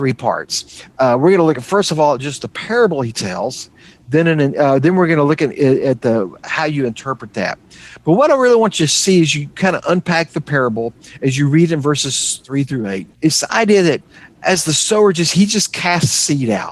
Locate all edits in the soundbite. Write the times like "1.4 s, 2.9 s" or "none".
13.1 s